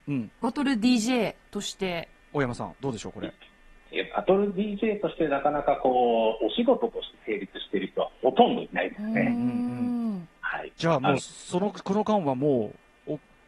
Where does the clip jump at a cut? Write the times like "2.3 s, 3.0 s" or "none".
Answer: none